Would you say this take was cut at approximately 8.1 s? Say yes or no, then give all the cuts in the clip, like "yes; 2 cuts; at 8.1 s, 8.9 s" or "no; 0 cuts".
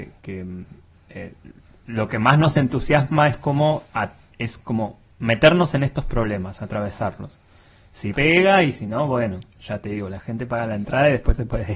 yes; 1 cut; at 8.1 s